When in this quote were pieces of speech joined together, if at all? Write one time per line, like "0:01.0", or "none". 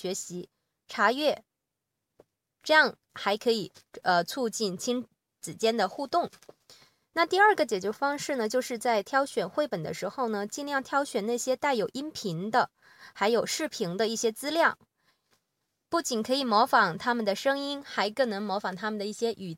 none